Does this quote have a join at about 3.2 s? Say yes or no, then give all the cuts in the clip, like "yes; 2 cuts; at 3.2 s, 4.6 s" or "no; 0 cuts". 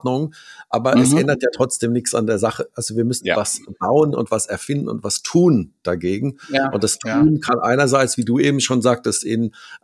yes; 1 cut; at 3.2 s